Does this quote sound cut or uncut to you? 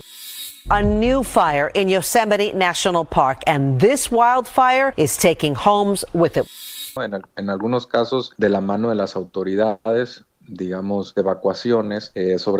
cut